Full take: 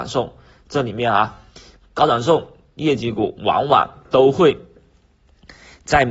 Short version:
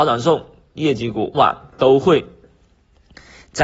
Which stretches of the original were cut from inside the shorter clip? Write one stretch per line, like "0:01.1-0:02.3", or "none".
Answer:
0:03.4-0:03.7

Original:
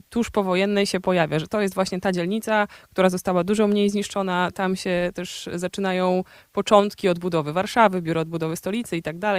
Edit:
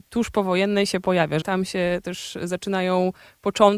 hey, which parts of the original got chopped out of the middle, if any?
0:01.4-0:04.5

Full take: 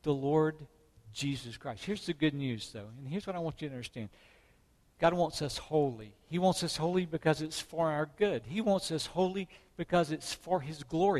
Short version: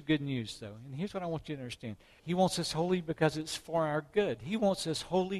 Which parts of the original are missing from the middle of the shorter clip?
0:04.3-0:06.2

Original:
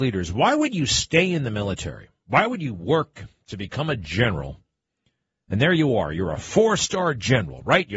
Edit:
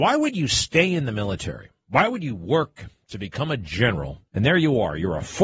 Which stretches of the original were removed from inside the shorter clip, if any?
0:04.7-0:05.4

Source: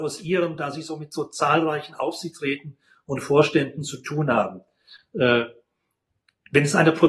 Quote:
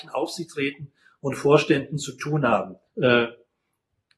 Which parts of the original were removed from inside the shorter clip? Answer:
0:04.7-0:05.0

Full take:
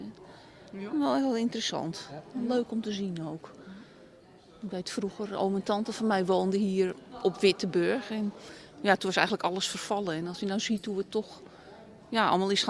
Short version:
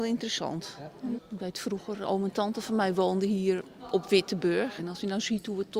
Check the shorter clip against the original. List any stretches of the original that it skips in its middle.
0:02.5-0:04.5
0:08.1-0:10.2

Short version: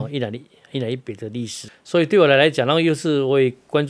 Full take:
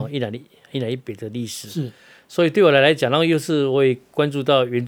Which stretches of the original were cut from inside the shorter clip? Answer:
0:01.7-0:02.1

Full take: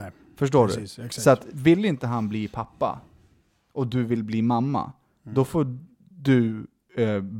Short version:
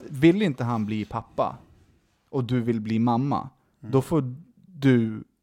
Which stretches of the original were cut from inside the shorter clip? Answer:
none

